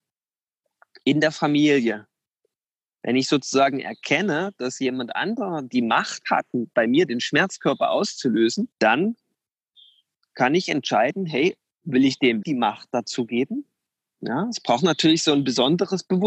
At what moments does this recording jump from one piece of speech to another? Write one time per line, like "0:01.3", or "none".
0:08.7
0:12.4